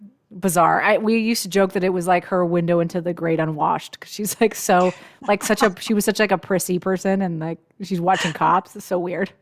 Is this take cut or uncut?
uncut